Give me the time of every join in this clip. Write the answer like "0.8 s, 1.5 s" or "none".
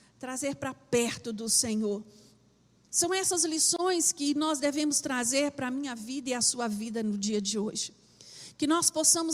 2.8 s